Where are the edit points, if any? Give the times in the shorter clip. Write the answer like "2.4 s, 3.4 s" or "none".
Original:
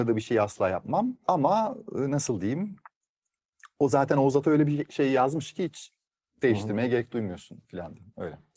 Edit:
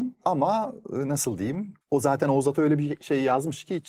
1.8 s